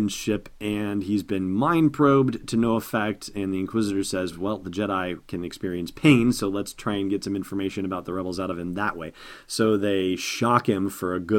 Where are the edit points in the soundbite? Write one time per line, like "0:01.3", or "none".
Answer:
none